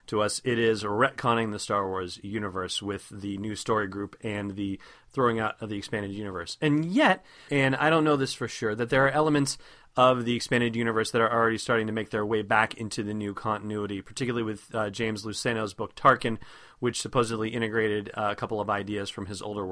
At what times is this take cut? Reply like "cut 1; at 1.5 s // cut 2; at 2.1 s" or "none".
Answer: cut 1; at 7.5 s